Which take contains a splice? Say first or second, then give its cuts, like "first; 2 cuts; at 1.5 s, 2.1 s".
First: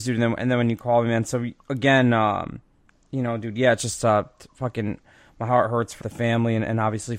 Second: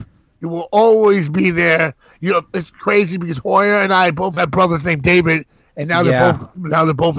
first; 1 cut; at 6.0 s